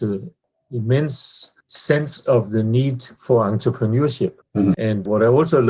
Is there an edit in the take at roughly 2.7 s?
no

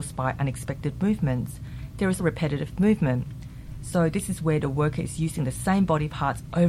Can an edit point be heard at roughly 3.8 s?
no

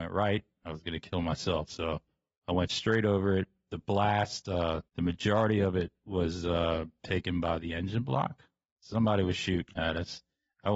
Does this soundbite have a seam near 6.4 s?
no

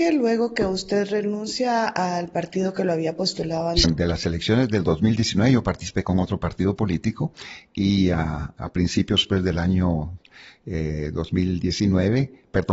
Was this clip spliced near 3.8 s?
yes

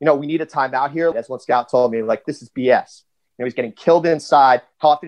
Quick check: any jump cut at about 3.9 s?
no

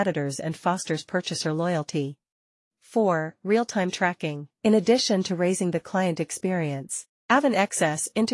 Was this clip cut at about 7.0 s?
no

